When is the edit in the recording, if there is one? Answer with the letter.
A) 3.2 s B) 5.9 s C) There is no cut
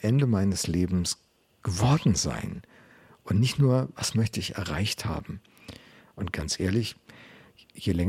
C